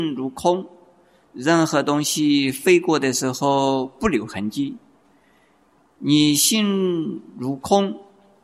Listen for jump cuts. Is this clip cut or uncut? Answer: uncut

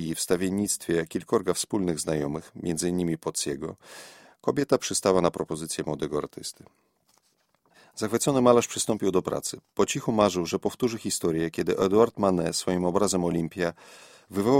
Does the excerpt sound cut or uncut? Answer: uncut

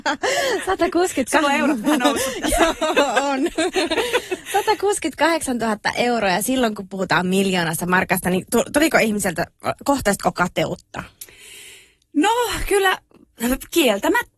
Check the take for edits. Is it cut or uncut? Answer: cut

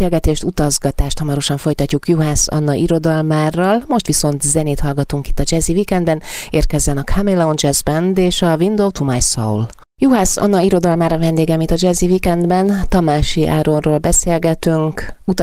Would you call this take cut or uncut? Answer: uncut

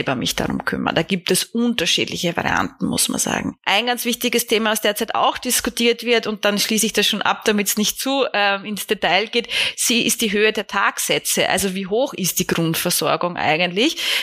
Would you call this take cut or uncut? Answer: uncut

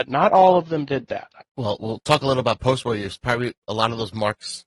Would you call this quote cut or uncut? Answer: cut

